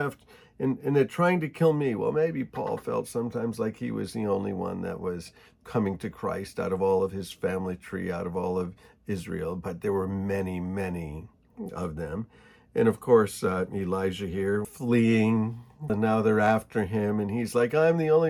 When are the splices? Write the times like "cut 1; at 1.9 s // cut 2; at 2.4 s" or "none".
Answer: cut 1; at 14.6 s // cut 2; at 15.9 s